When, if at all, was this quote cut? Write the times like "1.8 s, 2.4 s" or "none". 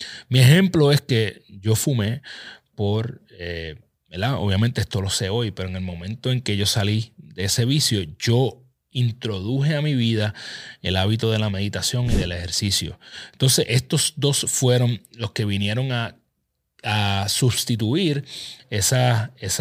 4.0 s

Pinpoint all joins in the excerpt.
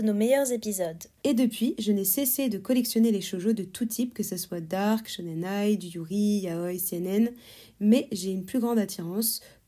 1.2 s

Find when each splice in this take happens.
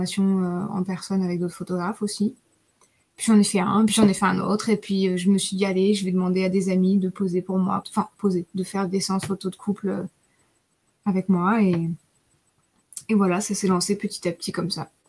7.8 s

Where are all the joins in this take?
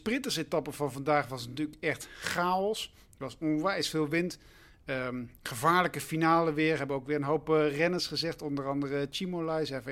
none

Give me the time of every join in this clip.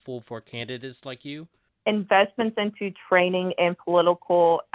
none

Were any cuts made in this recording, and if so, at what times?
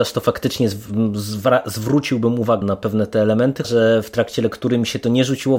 2.6 s, 3.6 s

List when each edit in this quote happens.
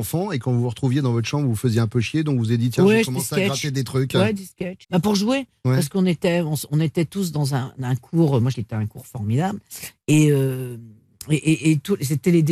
4.8 s, 8.5 s

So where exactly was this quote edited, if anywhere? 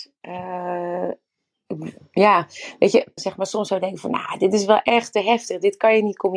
3.2 s

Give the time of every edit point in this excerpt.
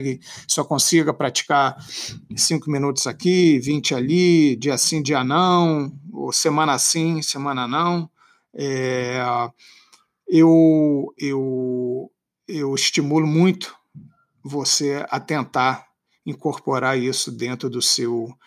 none

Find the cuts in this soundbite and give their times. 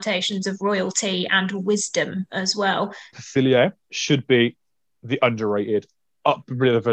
3.1 s

